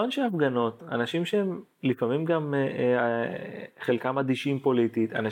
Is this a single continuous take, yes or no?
yes